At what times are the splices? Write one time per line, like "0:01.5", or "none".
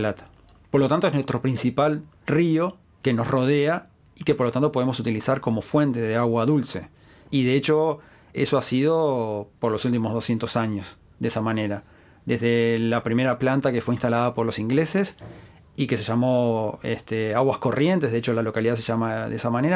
none